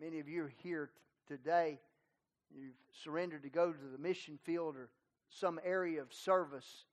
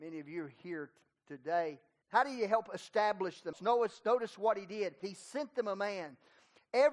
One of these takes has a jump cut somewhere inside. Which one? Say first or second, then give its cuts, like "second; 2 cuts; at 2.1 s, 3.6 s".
second; 3 cuts; at 2.0 s, 3.5 s, 5.0 s